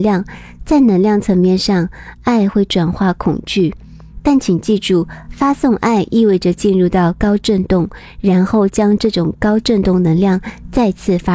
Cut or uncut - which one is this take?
uncut